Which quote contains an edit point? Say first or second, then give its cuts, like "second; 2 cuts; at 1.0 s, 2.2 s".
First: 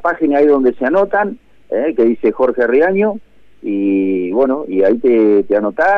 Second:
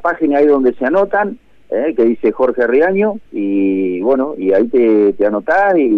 second; 1 cut; at 3.3 s